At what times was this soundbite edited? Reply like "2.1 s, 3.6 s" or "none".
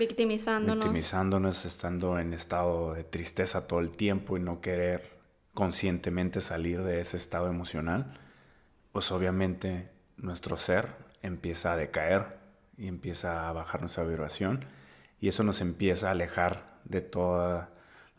none